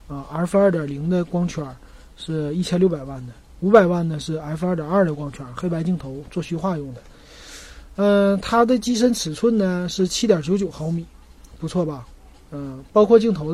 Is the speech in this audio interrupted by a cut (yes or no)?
no